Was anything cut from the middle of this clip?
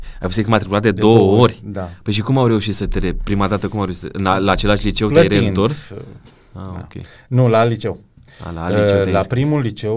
no; 0 cuts

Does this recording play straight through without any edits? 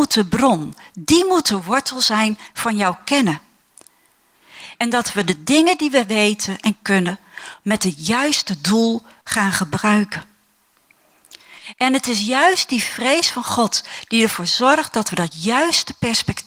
no; 2 cuts; at 4.7 s, 11.7 s

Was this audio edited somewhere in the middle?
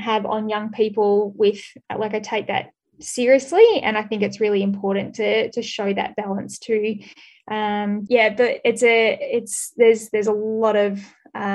yes; 1 cut; at 8.1 s

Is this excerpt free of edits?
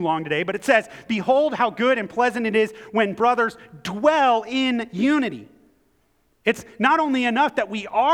yes; 0 cuts

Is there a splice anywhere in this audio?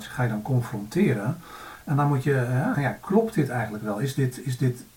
yes; 1 cut; at 2.7 s

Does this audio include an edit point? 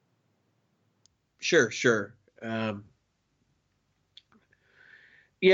no; 0 cuts

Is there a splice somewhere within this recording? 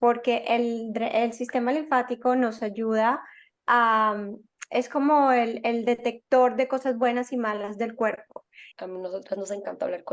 yes; 1 cut; at 8.7 s

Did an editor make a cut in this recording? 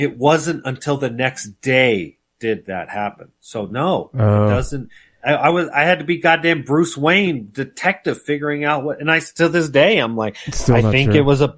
no; 0 cuts

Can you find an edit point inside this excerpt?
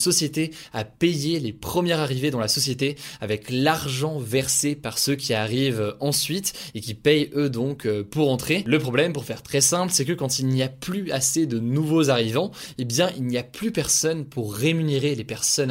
no; 0 cuts

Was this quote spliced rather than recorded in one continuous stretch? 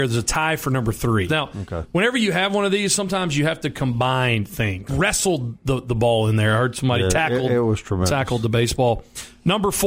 yes; 2 cuts; at 1.3 s, 4.9 s

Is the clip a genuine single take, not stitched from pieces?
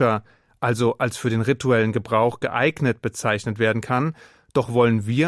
yes; 0 cuts

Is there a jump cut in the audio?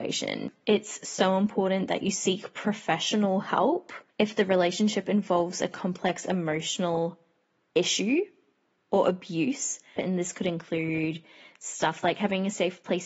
yes; 2 cuts; at 4.1 s, 10.0 s

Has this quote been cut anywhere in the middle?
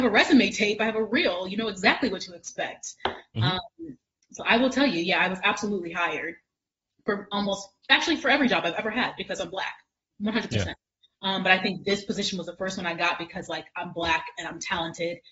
no; 0 cuts

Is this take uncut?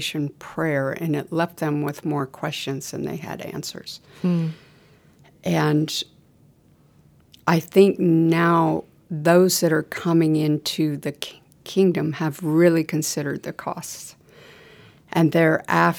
yes; 0 cuts

